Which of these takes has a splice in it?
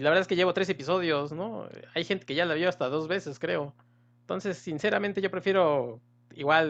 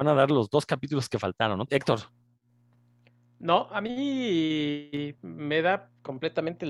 second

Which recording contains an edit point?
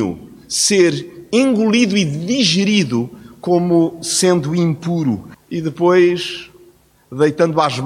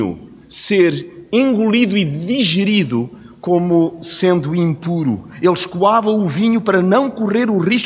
first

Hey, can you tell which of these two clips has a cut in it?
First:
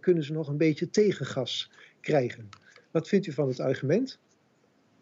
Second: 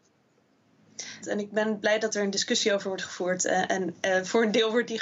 second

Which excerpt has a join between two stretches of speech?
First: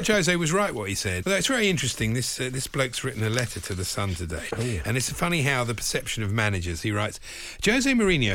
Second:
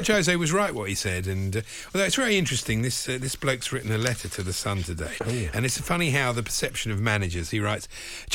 first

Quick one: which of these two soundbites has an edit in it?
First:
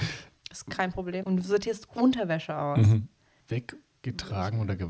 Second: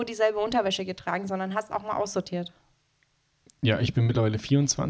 first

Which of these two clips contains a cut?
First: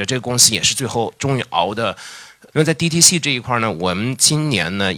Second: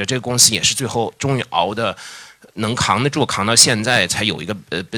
first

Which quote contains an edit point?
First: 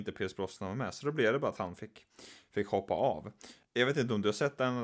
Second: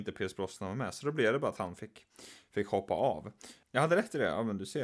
second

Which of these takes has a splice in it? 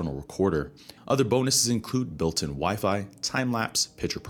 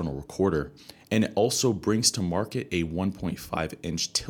first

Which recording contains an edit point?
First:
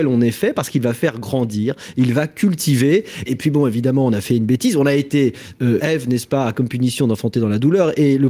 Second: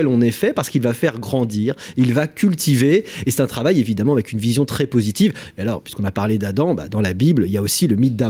first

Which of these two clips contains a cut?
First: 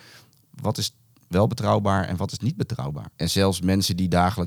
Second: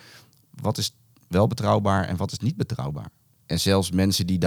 first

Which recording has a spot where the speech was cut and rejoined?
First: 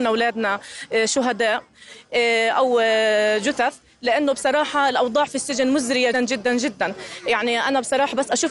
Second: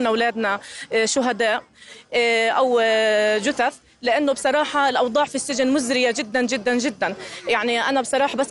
first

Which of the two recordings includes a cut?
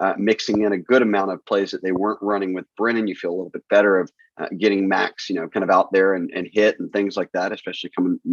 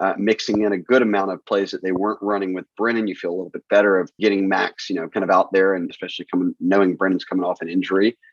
second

